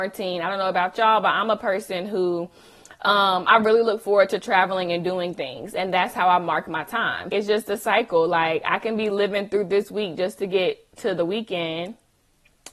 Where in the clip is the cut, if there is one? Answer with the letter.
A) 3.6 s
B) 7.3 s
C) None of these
B